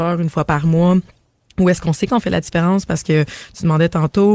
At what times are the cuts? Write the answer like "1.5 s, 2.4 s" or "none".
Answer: none